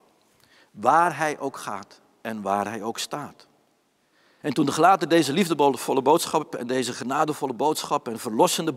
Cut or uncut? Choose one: cut